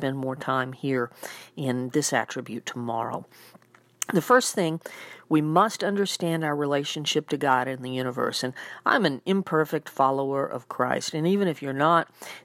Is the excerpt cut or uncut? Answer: cut